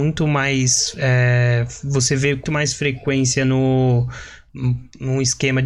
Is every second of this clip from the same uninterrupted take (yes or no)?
no